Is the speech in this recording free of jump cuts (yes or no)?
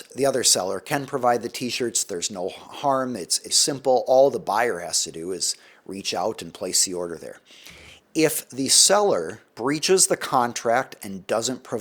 no